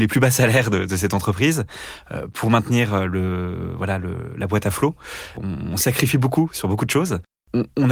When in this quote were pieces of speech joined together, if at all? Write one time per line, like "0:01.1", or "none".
none